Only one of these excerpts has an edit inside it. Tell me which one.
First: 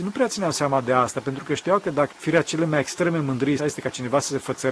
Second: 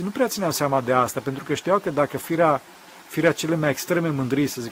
first; 2 cuts; at 2.1 s, 3.6 s

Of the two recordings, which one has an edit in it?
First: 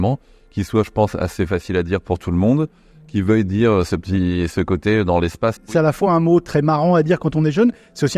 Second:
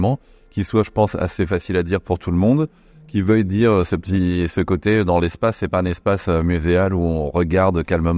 first; 1 cut; at 5.6 s

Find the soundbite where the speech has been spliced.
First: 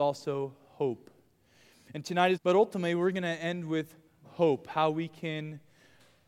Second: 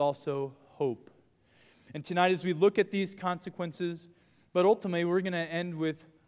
first; 1 cut; at 2.3 s

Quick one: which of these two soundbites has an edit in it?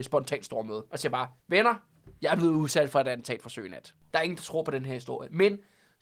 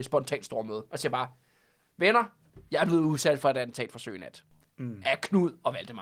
first; 2 cuts; at 1.4 s, 4.1 s

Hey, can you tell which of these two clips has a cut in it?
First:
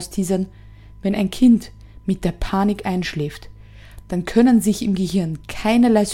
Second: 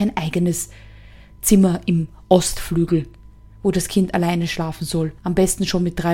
second; 1 cut; at 5.2 s

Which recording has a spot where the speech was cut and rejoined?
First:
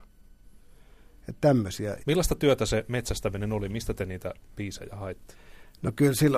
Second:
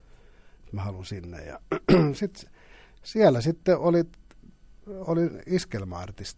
first; 1 cut; at 2.0 s

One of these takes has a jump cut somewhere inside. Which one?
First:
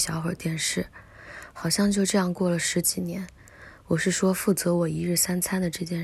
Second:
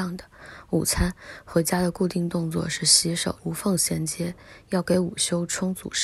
second; 1 cut; at 3.4 s

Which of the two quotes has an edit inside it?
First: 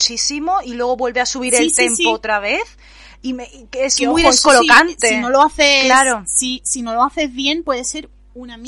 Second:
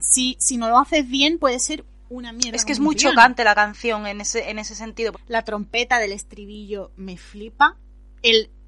second; 1 cut; at 5.1 s

